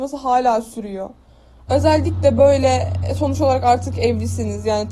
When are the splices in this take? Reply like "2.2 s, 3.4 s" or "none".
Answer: 1.7 s